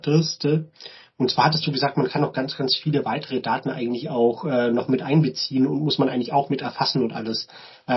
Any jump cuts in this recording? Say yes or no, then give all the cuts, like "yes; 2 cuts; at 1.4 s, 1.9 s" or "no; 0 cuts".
no; 0 cuts